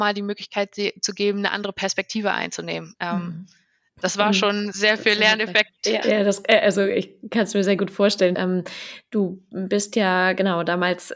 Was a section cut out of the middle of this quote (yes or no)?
yes